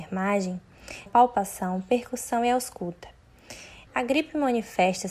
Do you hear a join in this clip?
yes; 2 cuts; at 1.1 s, 3.9 s

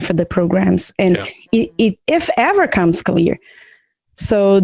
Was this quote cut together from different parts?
yes; 1 cut; at 2.1 s

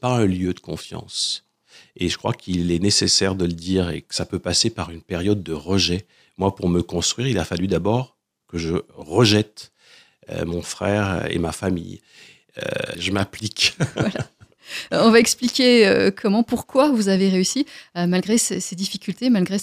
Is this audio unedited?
no; 1 cut; at 12.9 s

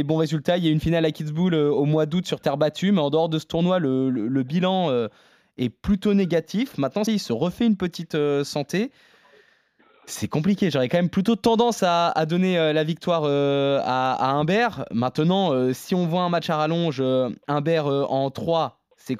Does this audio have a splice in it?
yes; 1 cut; at 7.1 s

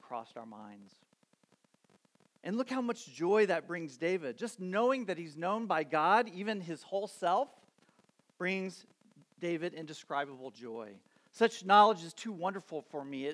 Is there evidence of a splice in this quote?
no; 0 cuts

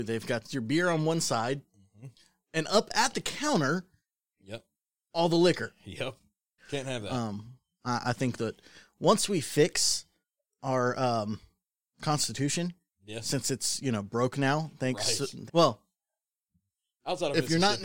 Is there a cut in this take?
yes; 2 cuts; at 6.6 s, 15.5 s

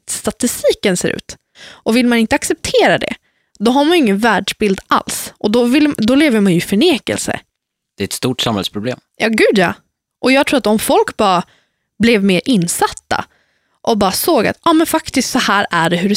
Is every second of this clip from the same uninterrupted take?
no; 1 cut; at 1.5 s

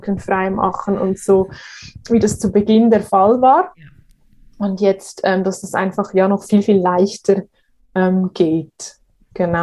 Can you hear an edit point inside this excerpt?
no; 0 cuts

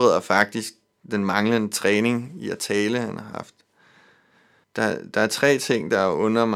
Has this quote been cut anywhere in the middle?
yes; 1 cut; at 4.6 s

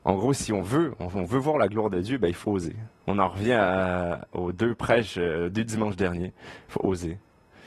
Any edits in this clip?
yes; 2 cuts; at 2.4 s, 6.6 s

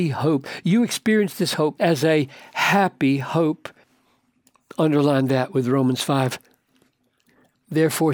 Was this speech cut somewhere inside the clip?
yes; 1 cut; at 1.7 s

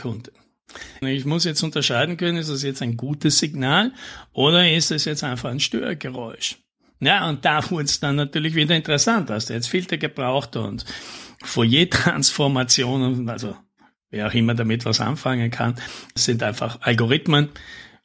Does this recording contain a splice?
yes; 1 cut; at 1.0 s

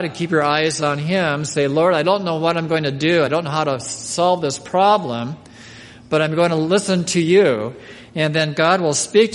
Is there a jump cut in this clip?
no; 0 cuts

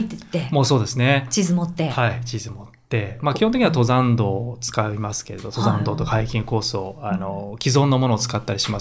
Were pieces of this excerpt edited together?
no; 0 cuts

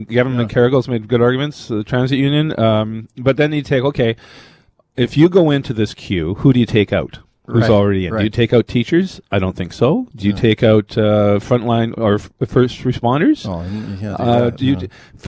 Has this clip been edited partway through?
no; 0 cuts

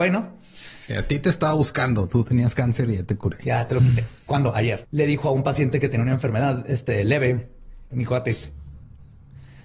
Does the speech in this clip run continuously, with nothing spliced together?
no; 2 cuts; at 4.8 s, 7.9 s

